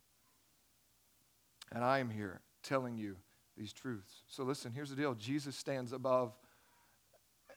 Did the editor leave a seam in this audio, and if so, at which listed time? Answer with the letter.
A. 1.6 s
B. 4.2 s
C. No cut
C